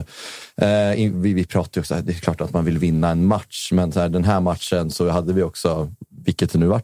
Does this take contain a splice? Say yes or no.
no